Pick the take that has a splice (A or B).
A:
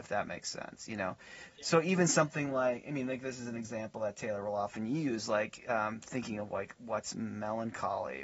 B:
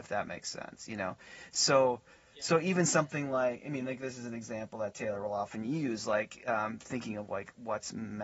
A